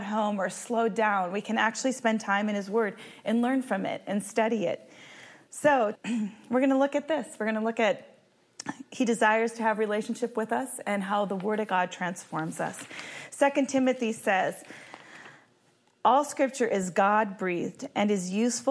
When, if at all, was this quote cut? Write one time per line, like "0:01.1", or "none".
0:06.0